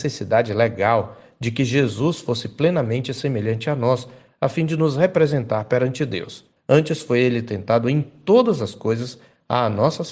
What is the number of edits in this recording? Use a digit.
1